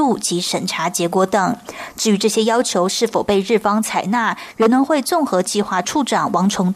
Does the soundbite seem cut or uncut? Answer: cut